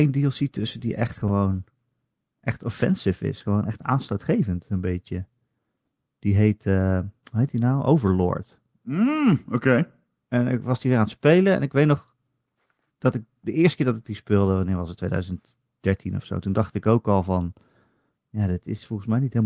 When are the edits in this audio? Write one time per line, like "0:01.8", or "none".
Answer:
none